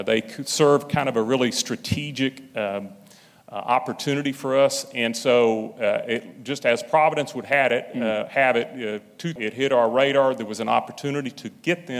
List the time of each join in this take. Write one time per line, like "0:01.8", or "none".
0:09.4